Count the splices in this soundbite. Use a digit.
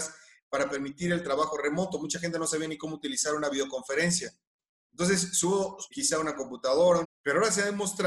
2